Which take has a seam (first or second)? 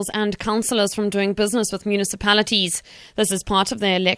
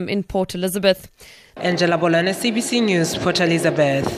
second